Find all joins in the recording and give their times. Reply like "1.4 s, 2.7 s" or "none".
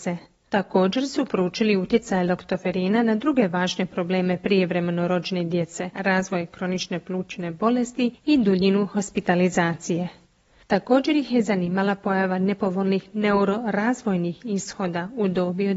5.9 s